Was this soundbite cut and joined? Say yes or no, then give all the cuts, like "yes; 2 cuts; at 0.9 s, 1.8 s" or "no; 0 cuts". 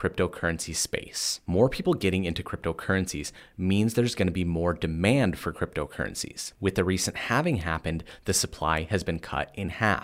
no; 0 cuts